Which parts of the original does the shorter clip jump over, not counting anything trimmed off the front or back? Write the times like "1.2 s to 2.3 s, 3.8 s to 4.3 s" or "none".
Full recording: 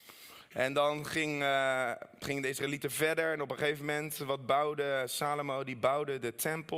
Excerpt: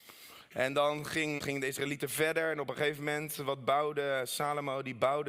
1.4 s to 2.2 s